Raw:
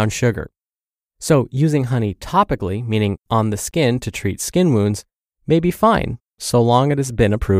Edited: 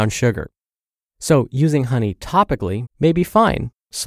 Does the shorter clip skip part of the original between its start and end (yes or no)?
yes